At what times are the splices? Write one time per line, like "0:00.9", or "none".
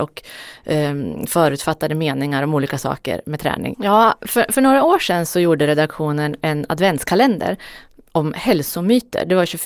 0:03.7